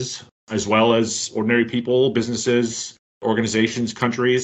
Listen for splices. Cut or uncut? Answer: uncut